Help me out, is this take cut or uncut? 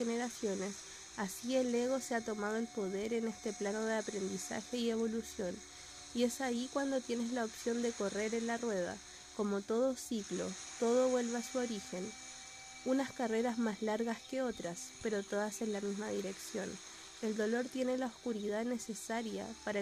uncut